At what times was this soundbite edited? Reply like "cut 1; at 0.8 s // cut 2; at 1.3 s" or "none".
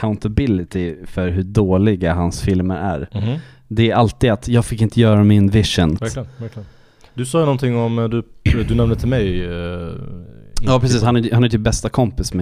cut 1; at 6.0 s